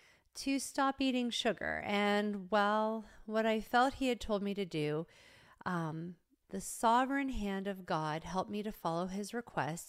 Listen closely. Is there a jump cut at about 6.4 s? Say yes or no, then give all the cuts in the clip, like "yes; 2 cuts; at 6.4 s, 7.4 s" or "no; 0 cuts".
yes; 1 cut; at 6.4 s